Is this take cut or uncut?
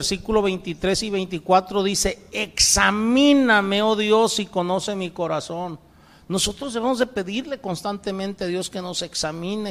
uncut